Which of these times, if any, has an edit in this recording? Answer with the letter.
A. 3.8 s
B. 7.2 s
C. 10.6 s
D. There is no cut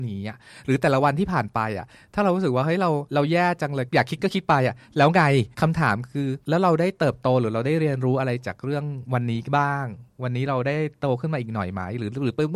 D